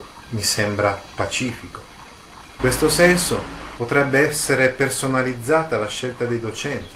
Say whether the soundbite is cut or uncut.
cut